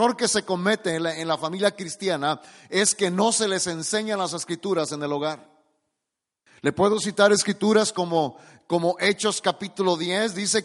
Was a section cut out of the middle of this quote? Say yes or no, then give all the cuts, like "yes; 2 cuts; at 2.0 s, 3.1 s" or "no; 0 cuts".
yes; 1 cut; at 6.5 s